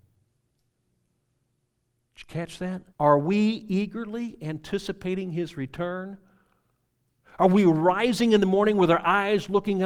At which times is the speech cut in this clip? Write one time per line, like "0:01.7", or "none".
0:02.9